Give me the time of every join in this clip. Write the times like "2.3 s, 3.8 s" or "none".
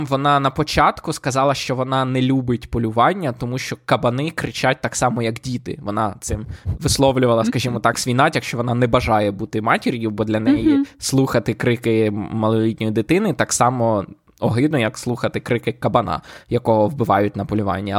none